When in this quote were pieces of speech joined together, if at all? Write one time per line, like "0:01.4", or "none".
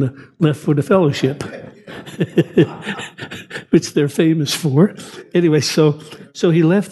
none